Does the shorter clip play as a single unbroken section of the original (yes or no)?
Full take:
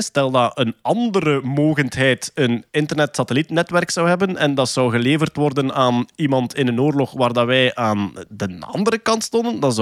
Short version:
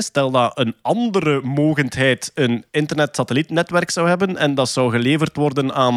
yes